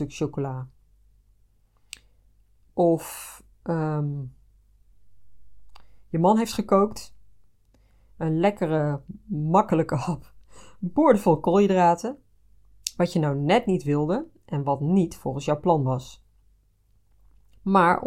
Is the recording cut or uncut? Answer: uncut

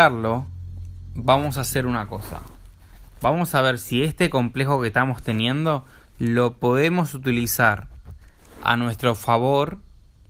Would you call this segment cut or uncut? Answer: uncut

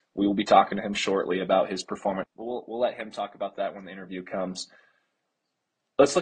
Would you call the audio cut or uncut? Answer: cut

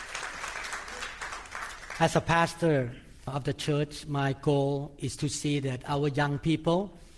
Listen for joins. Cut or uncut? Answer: uncut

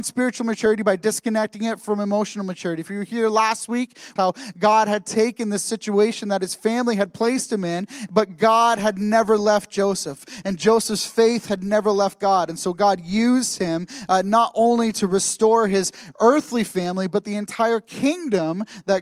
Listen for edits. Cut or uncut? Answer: cut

